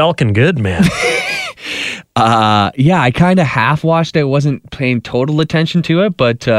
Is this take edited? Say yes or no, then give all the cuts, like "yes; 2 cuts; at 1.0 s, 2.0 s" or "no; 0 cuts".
no; 0 cuts